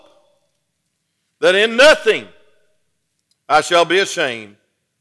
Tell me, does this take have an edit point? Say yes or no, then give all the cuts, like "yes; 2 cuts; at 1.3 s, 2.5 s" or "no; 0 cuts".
no; 0 cuts